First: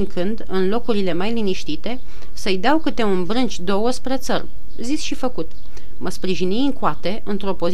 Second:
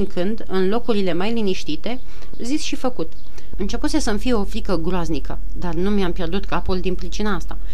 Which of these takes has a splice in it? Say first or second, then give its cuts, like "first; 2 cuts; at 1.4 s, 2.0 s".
second; 2 cuts; at 2.3 s, 3.5 s